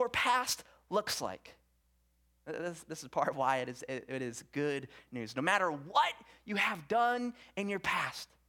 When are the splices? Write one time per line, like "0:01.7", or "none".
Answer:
none

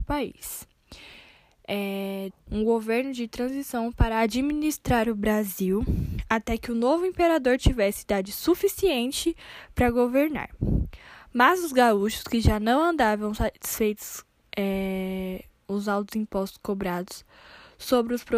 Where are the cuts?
0:02.3
0:15.6

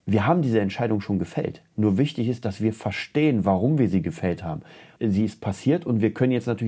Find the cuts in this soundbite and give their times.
0:05.0

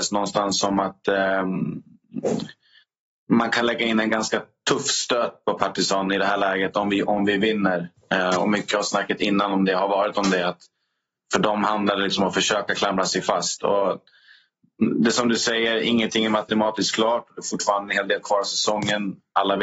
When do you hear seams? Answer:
none

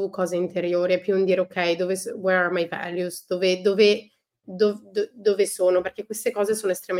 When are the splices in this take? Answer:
none

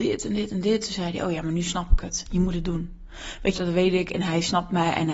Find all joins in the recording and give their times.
0:03.6

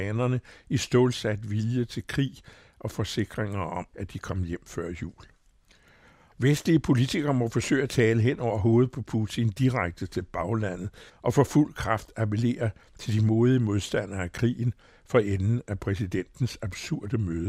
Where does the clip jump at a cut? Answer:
0:06.3
0:11.1

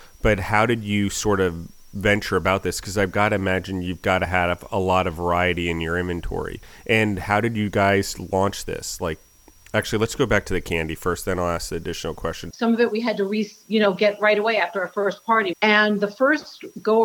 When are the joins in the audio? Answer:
0:12.5
0:15.5

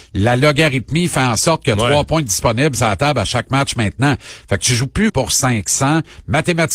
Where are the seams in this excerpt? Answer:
0:05.1

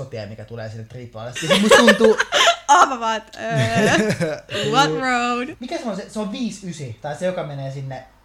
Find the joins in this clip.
0:01.4
0:05.5

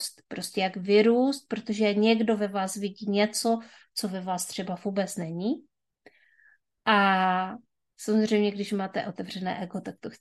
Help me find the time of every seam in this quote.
none

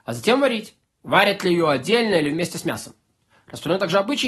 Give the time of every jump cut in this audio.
none

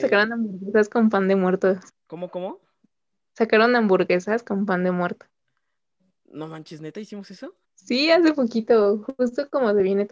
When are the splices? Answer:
0:01.9
0:07.6

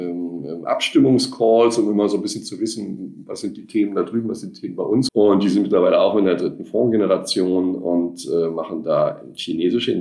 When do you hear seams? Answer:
0:05.1

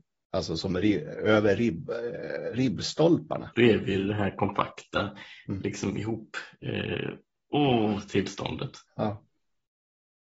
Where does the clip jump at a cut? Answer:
0:03.5

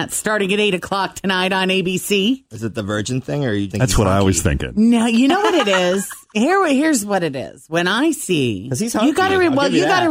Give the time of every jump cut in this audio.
0:03.7

